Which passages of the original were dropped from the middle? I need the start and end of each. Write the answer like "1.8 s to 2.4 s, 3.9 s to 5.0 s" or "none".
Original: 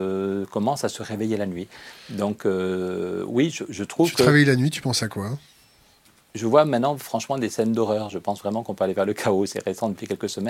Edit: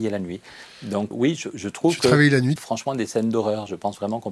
2.4 s to 3.3 s, 4.7 s to 7.0 s